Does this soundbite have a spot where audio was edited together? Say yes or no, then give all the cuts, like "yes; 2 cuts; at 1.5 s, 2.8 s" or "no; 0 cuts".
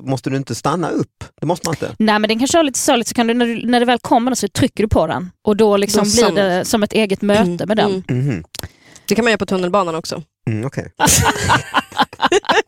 yes; 1 cut; at 11.0 s